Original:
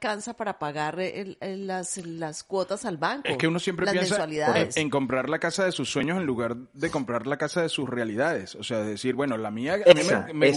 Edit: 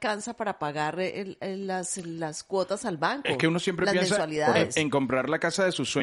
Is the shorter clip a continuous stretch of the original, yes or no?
yes